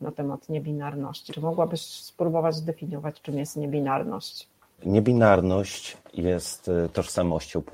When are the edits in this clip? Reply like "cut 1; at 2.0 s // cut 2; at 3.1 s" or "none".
cut 1; at 1.3 s // cut 2; at 4.8 s